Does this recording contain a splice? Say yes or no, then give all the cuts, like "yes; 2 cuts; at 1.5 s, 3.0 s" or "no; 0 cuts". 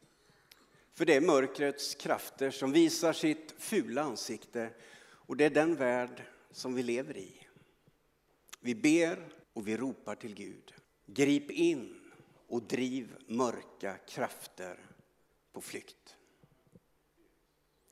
yes; 2 cuts; at 9.4 s, 10.8 s